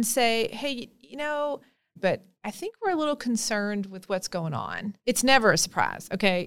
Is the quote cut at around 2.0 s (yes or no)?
yes